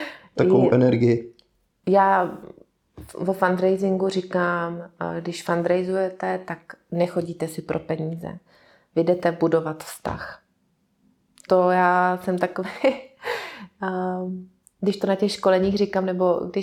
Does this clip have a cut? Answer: yes; 1 cut; at 11.5 s

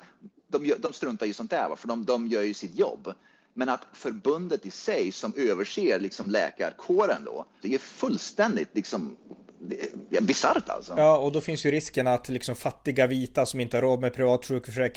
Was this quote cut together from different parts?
yes; 1 cut; at 7.6 s

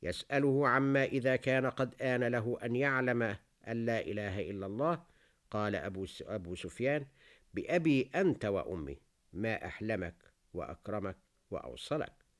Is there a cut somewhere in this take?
no; 0 cuts

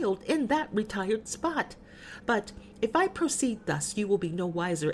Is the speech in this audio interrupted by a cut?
yes; 1 cut; at 2.2 s

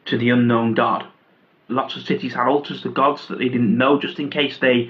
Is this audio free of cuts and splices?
no; 1 cut; at 1.7 s

